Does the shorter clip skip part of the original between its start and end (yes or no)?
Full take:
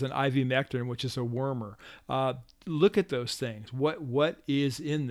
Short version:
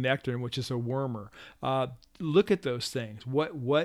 no